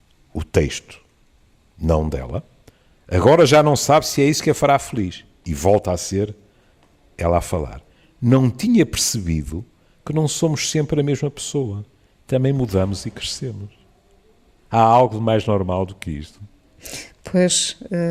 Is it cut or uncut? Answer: uncut